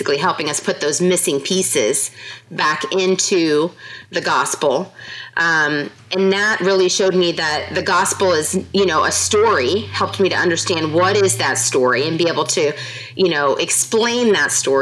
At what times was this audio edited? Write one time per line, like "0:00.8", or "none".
none